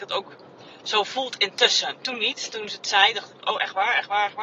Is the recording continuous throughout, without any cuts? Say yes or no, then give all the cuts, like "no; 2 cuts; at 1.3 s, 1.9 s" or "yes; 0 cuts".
yes; 0 cuts